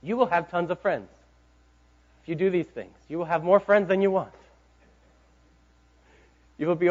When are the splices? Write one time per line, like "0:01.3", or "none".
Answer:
none